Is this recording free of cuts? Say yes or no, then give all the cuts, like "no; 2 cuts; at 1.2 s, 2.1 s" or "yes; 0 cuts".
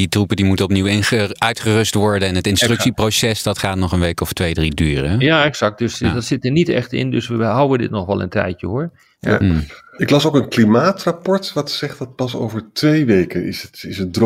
yes; 0 cuts